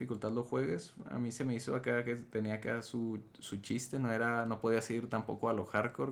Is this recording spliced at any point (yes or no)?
no